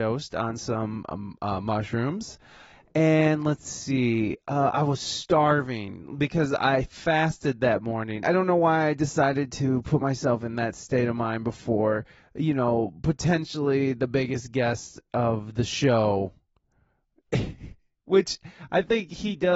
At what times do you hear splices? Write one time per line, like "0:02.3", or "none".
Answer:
0:08.2